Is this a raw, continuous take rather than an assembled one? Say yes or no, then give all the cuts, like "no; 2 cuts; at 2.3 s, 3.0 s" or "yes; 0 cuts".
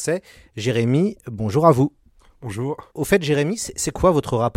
no; 1 cut; at 2.9 s